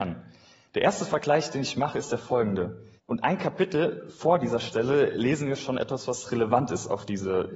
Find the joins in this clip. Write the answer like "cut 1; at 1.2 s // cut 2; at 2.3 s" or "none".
cut 1; at 3.0 s